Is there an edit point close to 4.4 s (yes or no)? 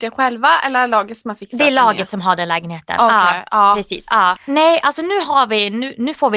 yes